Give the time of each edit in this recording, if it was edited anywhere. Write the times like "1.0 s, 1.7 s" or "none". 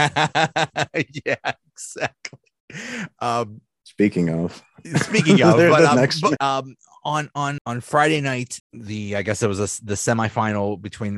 6.4 s, 7.6 s, 8.6 s